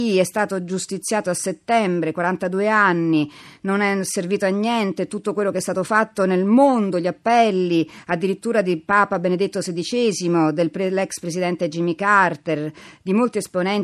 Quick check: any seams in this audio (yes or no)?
no